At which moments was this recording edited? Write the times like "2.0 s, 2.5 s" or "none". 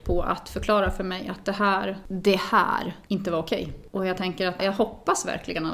3.1 s